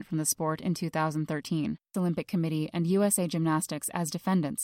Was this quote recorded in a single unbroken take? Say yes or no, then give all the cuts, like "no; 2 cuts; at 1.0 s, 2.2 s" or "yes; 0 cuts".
no; 1 cut; at 1.9 s